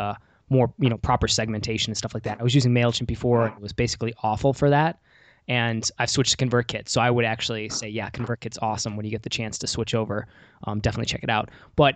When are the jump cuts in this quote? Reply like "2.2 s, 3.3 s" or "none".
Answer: none

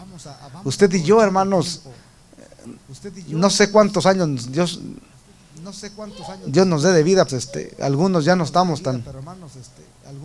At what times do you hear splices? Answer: 7.3 s

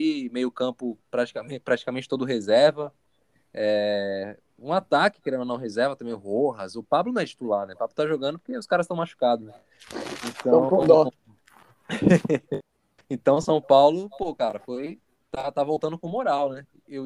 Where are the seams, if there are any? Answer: none

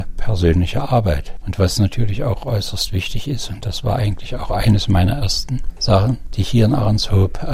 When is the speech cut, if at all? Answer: 1.4 s

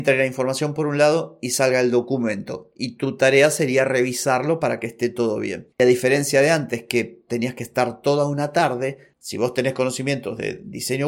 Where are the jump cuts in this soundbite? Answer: 5.8 s

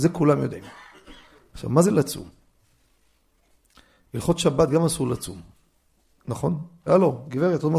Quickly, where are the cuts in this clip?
6.9 s

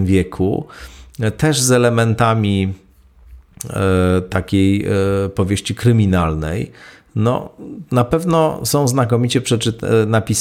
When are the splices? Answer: none

